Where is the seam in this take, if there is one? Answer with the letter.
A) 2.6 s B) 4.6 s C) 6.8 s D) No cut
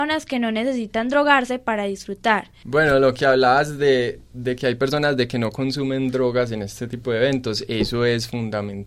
A